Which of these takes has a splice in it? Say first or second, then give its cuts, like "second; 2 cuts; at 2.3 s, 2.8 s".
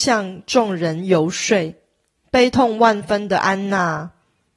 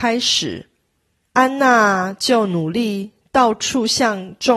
first; 1 cut; at 2.2 s